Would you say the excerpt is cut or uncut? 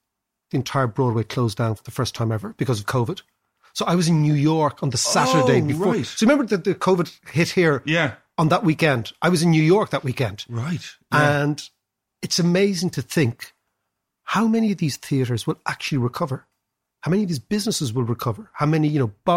uncut